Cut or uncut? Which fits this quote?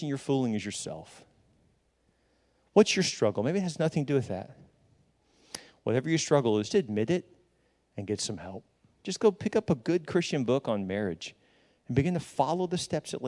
cut